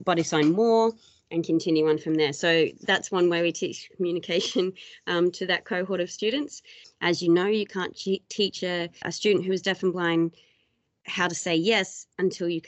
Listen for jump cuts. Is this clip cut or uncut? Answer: cut